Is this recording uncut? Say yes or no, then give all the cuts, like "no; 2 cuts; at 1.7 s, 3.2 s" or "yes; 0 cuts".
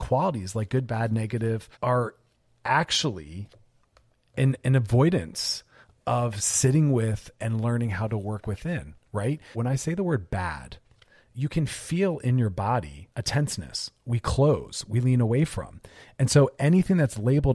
no; 3 cuts; at 1.7 s, 9.5 s, 13.1 s